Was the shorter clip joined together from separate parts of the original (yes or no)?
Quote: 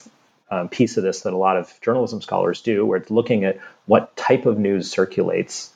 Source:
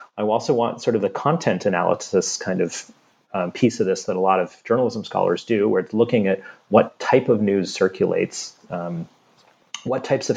no